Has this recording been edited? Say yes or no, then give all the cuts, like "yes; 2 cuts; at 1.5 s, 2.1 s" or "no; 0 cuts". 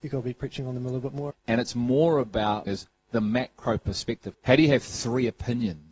yes; 3 cuts; at 1.3 s, 2.7 s, 4.3 s